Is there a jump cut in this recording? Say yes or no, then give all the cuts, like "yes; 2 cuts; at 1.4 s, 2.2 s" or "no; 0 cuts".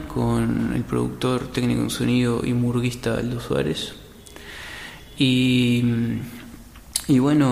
no; 0 cuts